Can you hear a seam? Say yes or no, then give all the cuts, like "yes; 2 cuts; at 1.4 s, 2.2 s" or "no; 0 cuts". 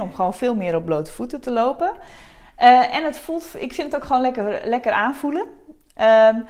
no; 0 cuts